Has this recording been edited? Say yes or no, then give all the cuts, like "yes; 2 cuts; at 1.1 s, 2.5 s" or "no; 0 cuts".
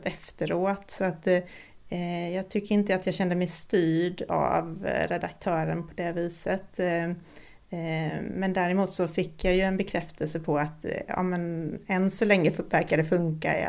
no; 0 cuts